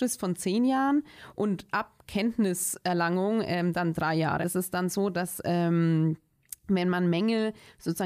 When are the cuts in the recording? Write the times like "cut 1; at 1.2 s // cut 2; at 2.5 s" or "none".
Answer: cut 1; at 4.4 s